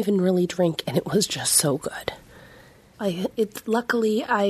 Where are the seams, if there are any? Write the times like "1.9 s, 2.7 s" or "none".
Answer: 2.9 s